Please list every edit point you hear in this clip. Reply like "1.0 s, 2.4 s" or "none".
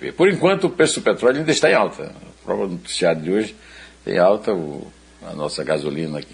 none